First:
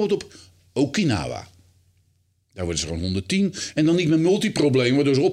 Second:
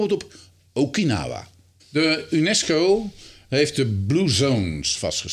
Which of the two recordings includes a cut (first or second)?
second